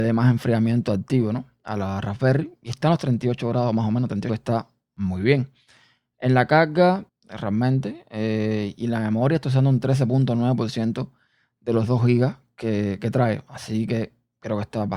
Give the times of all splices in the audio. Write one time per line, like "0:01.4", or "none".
0:04.3
0:07.1